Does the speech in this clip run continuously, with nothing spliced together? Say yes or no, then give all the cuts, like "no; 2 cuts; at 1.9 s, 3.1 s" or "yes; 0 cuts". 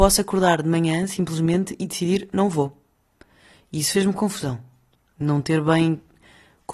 yes; 0 cuts